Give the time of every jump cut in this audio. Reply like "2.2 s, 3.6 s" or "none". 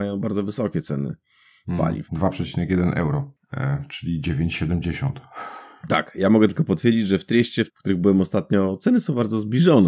2.1 s, 7.7 s